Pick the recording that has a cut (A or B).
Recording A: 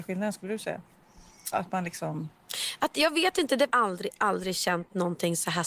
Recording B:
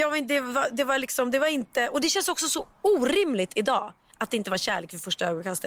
A